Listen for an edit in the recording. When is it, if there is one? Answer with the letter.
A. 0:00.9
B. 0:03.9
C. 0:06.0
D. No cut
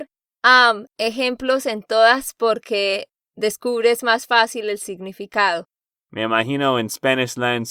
C